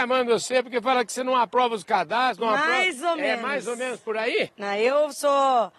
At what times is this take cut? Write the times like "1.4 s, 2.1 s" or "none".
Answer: 4.5 s

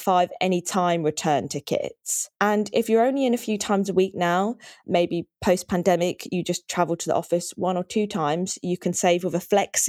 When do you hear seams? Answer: 2.3 s

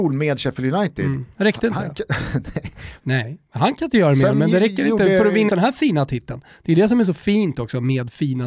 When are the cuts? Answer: 3.0 s, 5.5 s

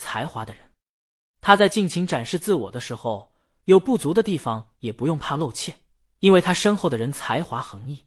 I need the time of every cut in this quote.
none

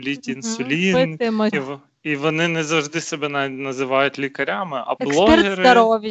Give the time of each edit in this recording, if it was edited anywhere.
1.5 s, 5.0 s

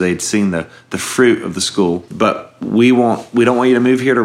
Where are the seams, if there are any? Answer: none

